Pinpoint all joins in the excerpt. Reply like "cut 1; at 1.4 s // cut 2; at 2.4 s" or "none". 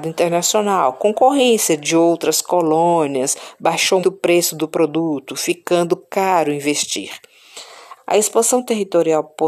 cut 1; at 4.0 s // cut 2; at 8.0 s